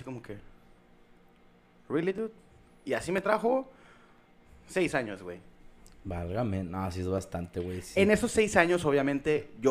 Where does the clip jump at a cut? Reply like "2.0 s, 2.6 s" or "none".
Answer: none